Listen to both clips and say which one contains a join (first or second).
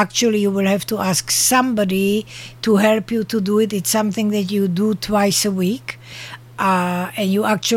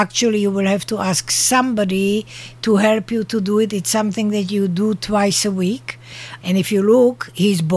second